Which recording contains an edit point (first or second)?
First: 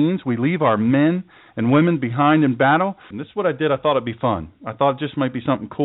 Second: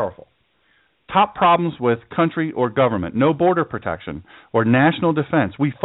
first